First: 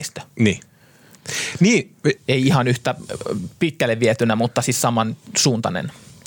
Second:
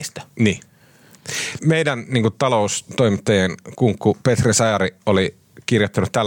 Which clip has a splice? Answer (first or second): second